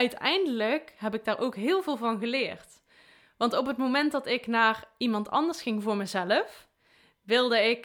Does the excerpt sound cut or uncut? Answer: uncut